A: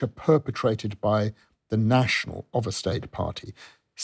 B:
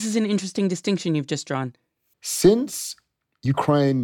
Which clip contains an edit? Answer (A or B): B